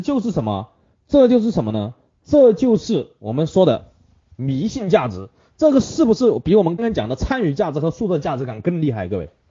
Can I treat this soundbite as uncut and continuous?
no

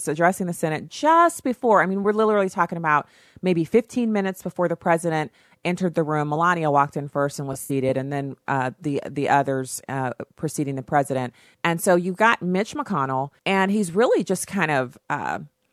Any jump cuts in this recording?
yes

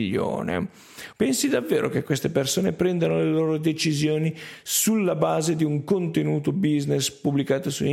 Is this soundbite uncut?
no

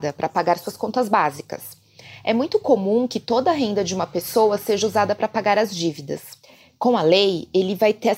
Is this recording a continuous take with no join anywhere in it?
yes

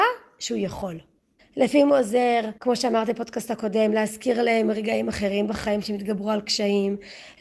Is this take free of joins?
no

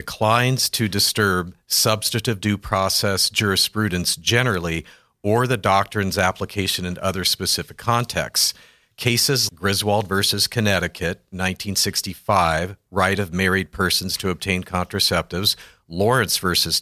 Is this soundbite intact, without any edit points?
no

